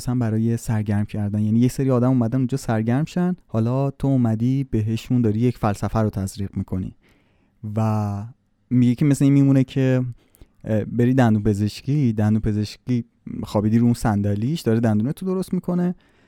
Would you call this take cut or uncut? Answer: cut